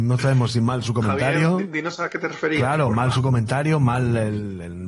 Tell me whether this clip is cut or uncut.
uncut